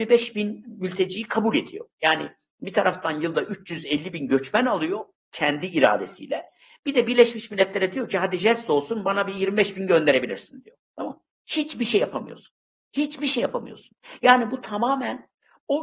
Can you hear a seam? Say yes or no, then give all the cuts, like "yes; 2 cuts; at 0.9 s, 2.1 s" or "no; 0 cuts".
yes; 1 cut; at 11.3 s